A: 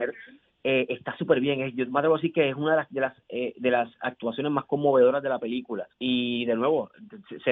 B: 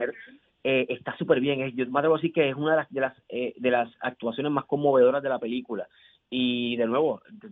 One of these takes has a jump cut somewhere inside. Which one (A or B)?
A